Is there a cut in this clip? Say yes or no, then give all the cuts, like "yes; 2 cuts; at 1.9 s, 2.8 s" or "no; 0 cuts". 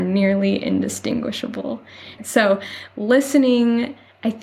yes; 1 cut; at 2.2 s